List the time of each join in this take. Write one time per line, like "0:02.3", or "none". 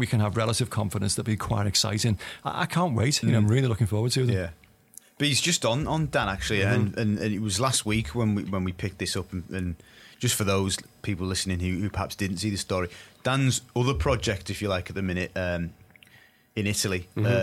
none